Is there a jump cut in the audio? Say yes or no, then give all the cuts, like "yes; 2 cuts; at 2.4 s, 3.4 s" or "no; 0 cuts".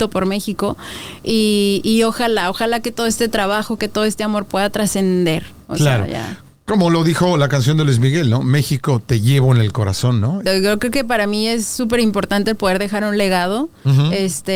yes; 2 cuts; at 3.8 s, 10.5 s